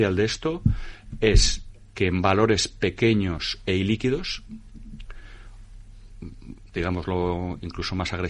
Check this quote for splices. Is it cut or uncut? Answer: cut